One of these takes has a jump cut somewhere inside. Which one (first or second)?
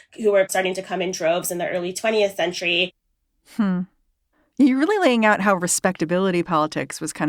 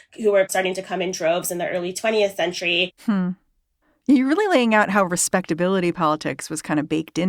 second